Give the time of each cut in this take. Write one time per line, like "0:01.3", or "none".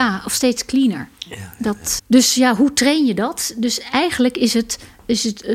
0:02.0